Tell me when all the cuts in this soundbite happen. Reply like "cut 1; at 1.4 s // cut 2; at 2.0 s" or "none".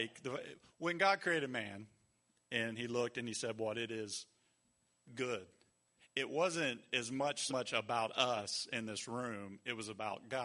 cut 1; at 6.0 s // cut 2; at 7.5 s